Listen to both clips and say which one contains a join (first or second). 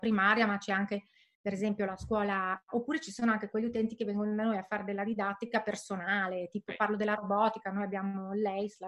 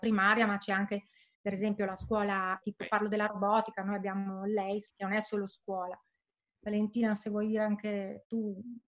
second